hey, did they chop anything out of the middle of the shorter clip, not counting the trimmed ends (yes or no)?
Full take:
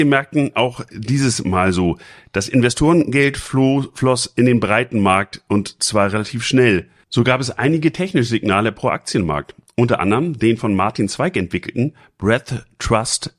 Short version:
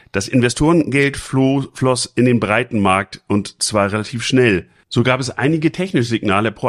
no